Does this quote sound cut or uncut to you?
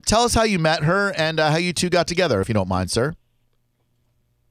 uncut